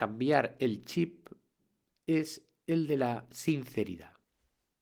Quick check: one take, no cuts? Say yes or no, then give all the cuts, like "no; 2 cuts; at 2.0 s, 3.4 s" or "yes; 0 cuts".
yes; 0 cuts